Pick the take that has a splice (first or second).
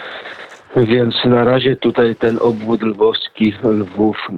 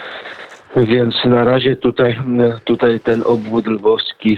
first